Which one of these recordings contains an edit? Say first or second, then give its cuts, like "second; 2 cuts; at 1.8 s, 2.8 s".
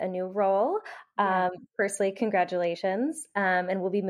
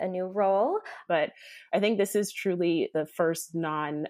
second; 2 cuts; at 1.1 s, 2.9 s